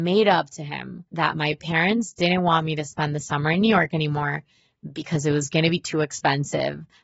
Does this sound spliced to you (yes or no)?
yes